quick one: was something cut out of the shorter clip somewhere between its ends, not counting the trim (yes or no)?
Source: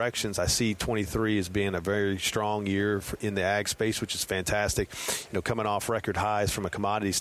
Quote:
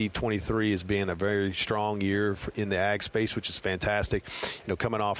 no